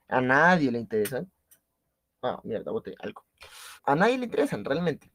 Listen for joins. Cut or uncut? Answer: cut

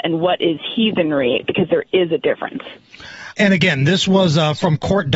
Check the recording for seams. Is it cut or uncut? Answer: cut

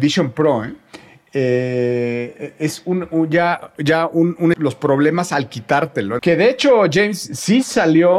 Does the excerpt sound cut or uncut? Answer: cut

